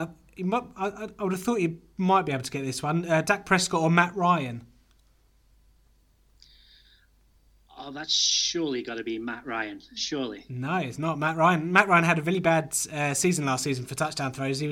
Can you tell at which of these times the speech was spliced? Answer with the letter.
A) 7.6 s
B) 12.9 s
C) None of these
C